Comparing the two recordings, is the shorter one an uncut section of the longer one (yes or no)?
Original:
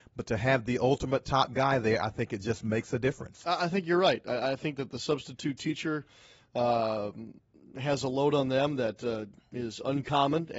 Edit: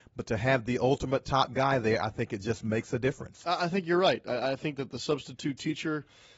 yes